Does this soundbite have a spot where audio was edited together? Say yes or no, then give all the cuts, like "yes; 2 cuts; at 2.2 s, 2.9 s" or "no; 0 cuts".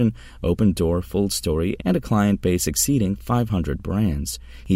yes; 1 cut; at 1.8 s